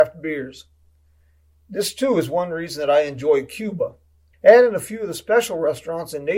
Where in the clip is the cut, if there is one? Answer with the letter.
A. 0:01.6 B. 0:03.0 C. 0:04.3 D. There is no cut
C